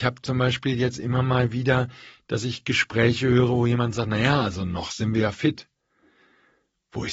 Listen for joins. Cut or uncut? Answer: uncut